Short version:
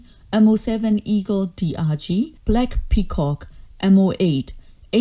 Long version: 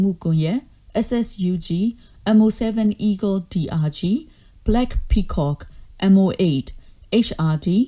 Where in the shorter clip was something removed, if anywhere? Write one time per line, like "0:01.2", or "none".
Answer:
0:02.4